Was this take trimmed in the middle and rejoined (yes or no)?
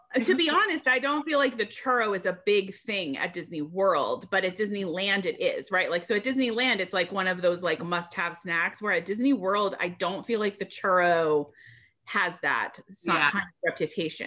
no